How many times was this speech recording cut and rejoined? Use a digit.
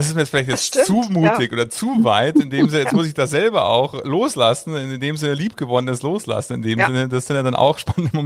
0